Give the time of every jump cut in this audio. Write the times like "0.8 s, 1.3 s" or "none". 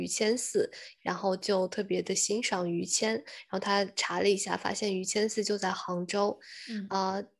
1.0 s